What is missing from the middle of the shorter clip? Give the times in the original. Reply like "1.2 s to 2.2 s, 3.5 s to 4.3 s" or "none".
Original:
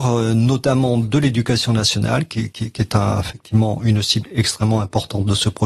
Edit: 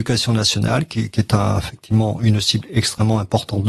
2.5 s to 2.7 s